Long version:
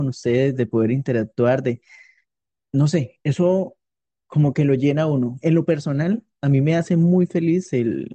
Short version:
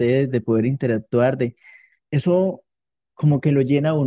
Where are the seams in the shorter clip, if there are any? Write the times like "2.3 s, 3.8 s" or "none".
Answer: 2.1 s